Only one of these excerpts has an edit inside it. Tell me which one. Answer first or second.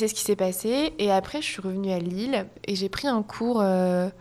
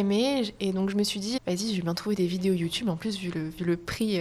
second